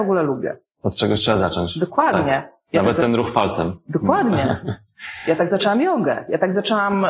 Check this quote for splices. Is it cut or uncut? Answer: uncut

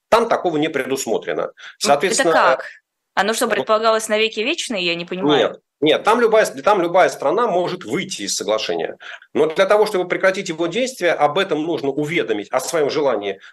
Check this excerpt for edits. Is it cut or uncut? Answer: cut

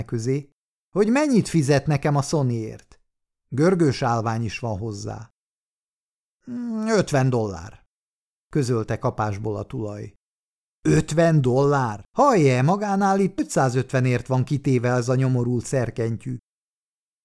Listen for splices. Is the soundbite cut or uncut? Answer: cut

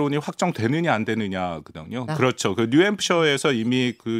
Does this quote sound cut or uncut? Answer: cut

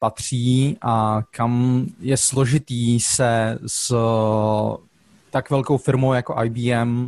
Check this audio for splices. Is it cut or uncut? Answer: uncut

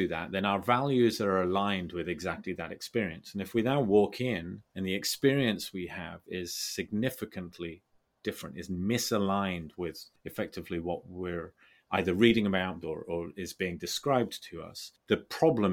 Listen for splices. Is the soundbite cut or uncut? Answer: cut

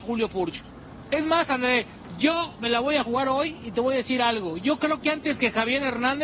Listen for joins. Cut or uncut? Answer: cut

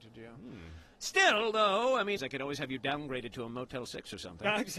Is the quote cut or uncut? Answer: cut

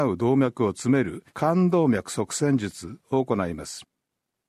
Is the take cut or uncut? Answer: cut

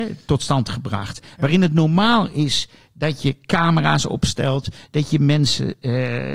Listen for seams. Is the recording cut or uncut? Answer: uncut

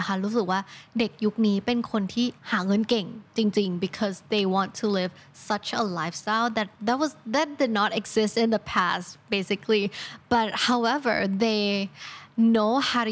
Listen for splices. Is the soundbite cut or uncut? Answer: cut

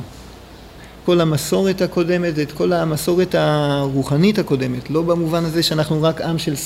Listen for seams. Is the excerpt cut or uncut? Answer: cut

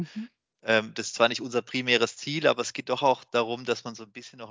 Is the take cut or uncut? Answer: uncut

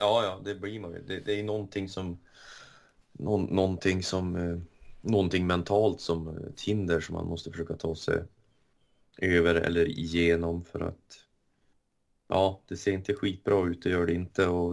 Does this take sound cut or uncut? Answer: uncut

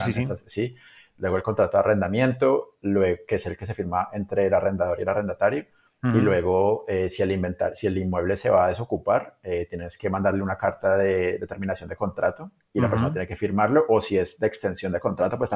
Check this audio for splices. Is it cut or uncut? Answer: uncut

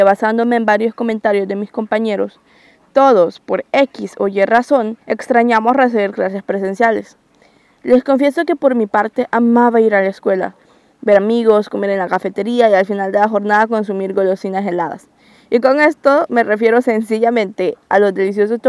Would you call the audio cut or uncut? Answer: cut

